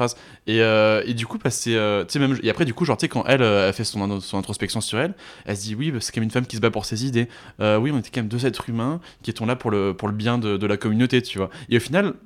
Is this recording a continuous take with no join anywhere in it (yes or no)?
yes